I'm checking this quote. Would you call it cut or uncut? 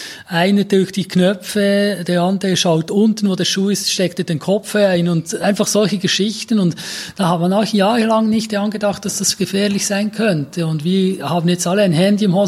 uncut